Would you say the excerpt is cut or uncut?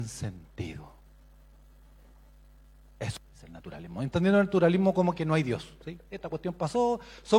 uncut